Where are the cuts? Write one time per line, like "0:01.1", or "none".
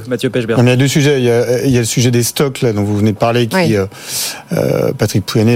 none